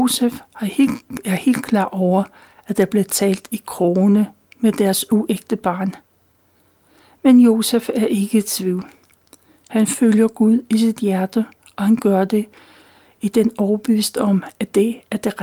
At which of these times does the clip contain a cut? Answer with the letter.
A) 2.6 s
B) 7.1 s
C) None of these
C